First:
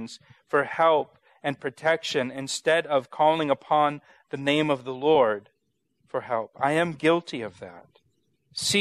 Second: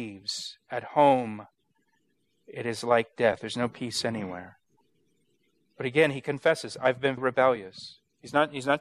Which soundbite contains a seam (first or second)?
second